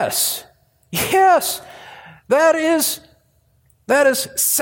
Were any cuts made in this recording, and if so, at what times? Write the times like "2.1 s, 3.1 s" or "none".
none